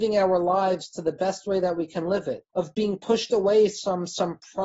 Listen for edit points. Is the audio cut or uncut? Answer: cut